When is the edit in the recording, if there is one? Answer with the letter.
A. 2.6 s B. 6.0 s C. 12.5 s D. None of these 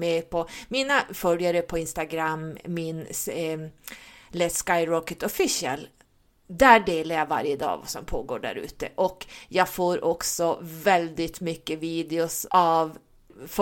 C